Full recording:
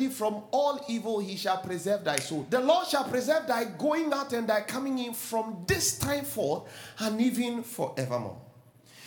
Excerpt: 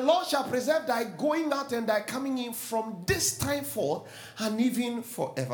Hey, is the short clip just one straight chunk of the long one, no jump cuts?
yes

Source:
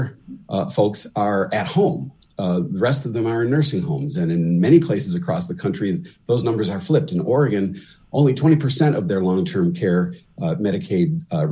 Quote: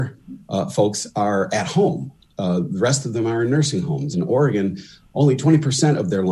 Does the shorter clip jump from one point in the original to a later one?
yes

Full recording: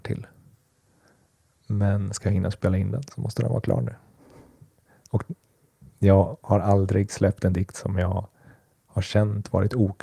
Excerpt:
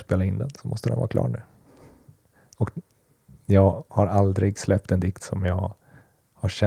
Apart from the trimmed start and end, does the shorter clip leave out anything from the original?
no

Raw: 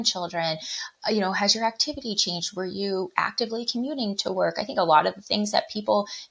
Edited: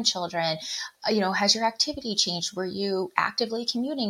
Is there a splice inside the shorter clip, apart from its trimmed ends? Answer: no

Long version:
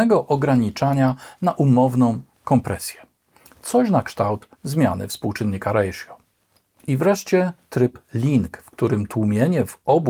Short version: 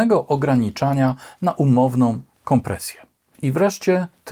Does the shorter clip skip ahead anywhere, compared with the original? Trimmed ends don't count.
yes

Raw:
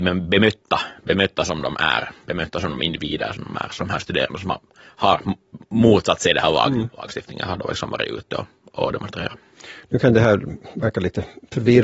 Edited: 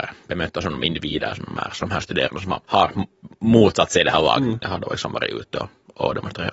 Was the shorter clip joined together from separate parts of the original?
yes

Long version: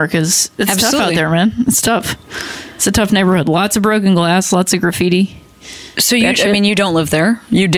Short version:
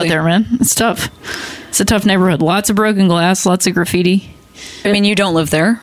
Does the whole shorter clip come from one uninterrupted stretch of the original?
no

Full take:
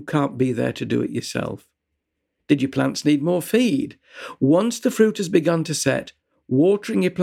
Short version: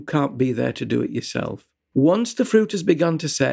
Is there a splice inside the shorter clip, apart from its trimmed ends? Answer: yes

